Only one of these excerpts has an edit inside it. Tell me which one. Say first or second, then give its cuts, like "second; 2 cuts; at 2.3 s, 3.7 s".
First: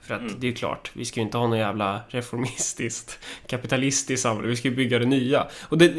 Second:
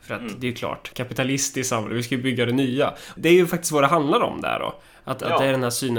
second; 2 cuts; at 0.9 s, 3.2 s